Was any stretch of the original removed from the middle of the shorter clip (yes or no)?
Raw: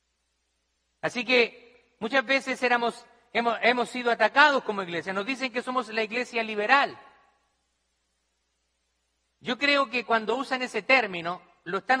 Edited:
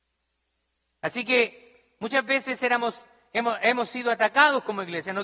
no